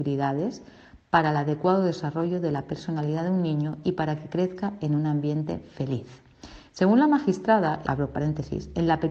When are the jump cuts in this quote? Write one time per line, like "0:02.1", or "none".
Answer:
0:06.7
0:07.8